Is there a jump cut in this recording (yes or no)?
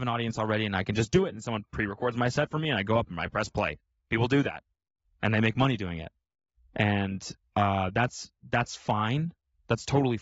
no